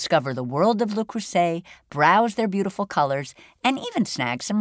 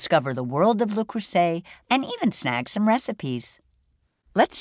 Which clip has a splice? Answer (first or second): second